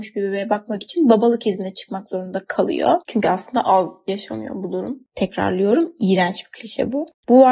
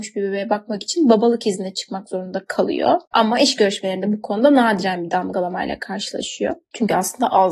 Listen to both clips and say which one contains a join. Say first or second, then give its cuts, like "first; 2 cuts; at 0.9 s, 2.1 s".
first; 2 cuts; at 3.0 s, 5.1 s